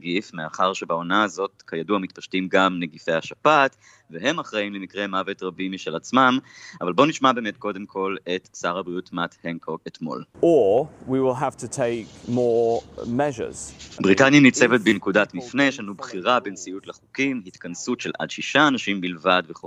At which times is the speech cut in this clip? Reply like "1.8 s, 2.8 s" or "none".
10.3 s, 14.0 s